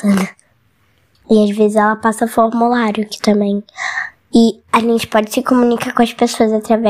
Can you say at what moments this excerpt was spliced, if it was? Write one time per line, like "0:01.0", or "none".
0:01.1